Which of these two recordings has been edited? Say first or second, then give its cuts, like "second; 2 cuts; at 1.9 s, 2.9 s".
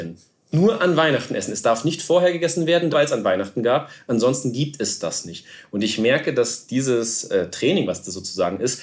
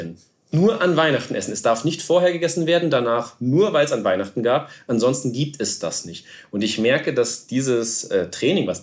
first; 1 cut; at 2.9 s